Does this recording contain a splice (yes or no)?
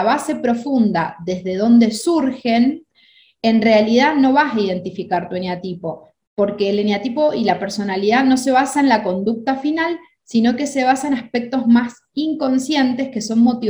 no